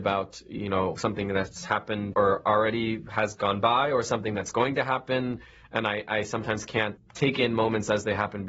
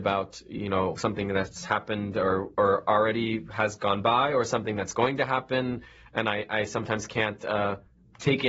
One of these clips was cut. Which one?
first; 2 cuts; at 2.1 s, 7.0 s

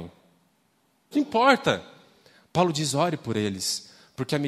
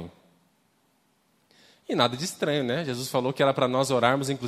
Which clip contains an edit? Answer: first; 1 cut; at 1.1 s

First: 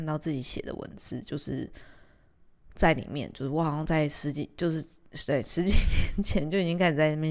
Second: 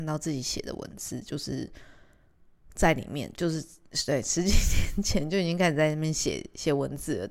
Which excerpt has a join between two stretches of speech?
second; 1 cut; at 3.3 s

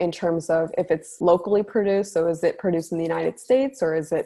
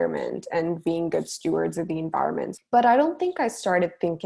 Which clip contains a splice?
second; 1 cut; at 2.6 s

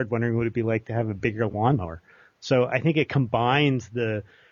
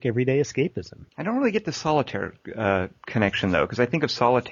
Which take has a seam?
second; 1 cut; at 1.1 s

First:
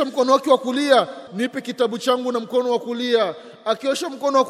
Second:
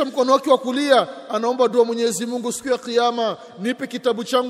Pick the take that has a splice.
first; 1 cut; at 1.3 s

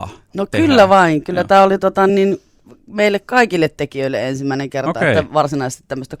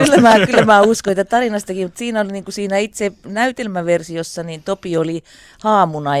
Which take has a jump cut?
first; 1 cut; at 2.1 s

